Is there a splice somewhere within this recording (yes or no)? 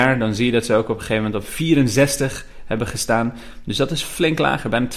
no